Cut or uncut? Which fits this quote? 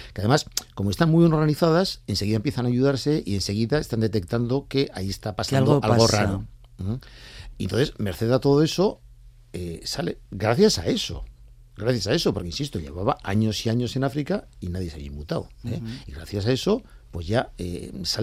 uncut